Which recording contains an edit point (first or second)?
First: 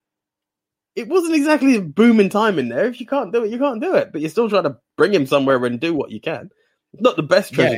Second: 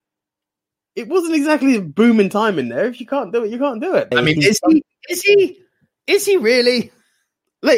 second